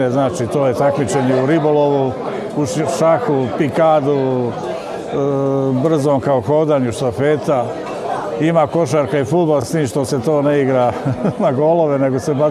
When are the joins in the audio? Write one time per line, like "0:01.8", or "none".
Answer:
none